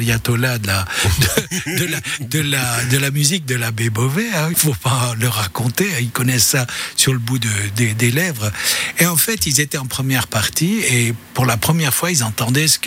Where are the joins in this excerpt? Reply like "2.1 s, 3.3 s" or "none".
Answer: 4.5 s